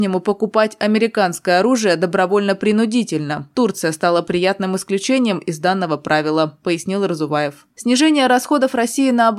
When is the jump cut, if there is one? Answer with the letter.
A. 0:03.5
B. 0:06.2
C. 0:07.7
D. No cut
D